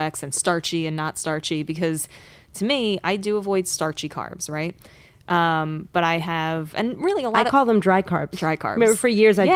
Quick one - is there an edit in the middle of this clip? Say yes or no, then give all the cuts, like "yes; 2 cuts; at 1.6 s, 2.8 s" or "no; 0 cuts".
no; 0 cuts